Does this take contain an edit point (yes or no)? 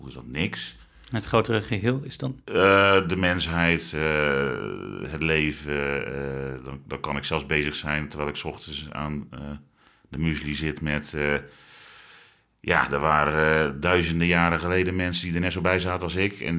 no